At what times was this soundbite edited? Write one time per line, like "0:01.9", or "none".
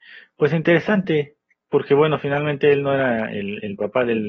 none